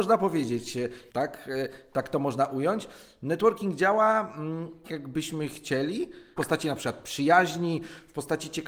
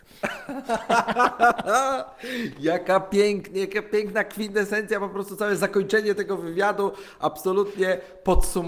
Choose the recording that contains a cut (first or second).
first